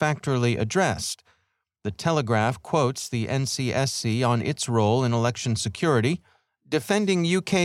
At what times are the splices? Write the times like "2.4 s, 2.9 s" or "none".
6.5 s